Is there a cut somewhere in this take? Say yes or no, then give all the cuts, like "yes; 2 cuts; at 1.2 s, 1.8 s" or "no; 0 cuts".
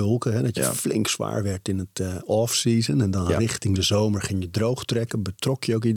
no; 0 cuts